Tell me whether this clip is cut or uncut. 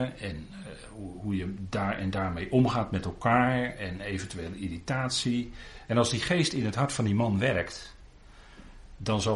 cut